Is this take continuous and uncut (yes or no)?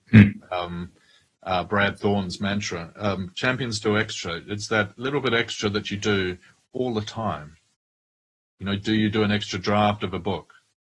yes